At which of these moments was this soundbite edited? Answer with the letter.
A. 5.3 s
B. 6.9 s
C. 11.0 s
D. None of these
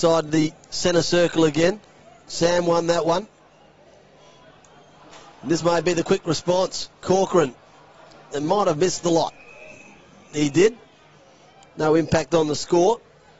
B